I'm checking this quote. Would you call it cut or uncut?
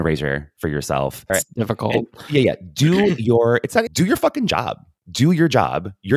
cut